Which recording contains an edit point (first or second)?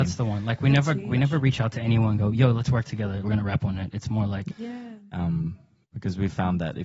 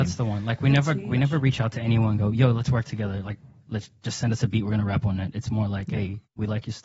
first